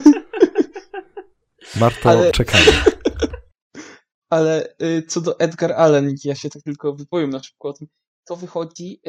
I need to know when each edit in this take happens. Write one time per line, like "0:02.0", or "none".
0:02.3